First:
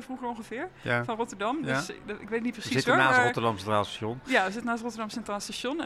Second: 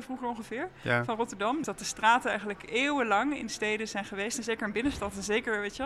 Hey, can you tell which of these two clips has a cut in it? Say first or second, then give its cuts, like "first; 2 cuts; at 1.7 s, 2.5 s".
second; 1 cut; at 1.6 s